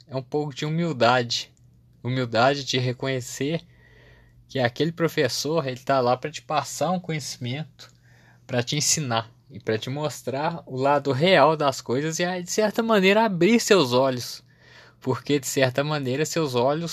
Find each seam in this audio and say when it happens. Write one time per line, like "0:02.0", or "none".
none

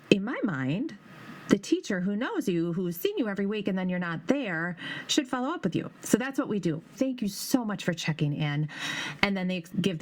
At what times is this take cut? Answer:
0:06.9

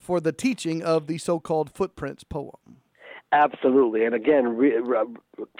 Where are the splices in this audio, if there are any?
none

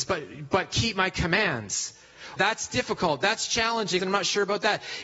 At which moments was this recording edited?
0:02.4
0:04.0

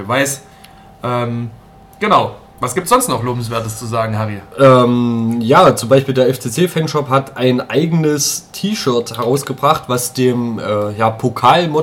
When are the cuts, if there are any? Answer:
0:04.5

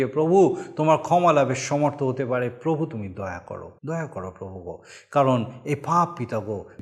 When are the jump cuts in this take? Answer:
0:03.8

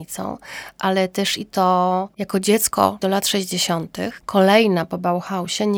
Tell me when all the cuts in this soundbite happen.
0:03.0
0:04.2

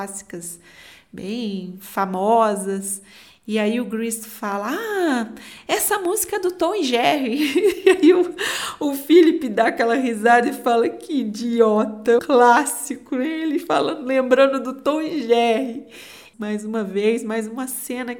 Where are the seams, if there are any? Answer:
0:12.2
0:16.3

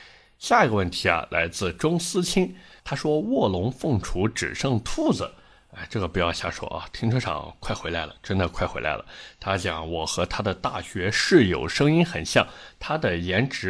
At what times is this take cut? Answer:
none

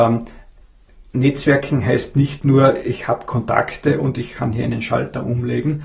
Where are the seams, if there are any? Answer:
none

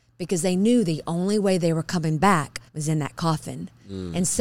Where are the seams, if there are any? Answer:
0:02.7

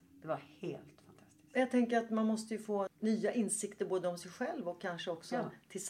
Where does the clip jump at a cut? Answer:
0:02.9

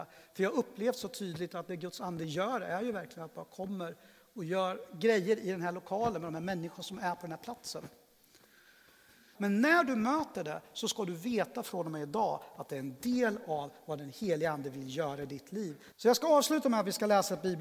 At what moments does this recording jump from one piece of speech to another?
0:09.4
0:15.9

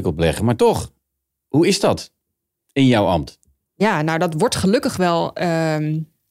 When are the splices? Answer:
none

